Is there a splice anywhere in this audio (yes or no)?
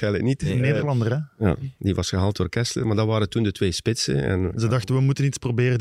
no